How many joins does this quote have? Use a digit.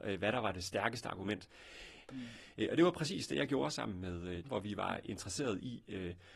2